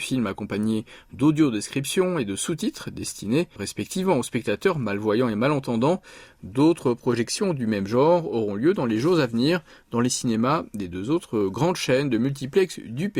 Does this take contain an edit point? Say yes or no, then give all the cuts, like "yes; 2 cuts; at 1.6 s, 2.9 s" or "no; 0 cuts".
yes; 1 cut; at 3.6 s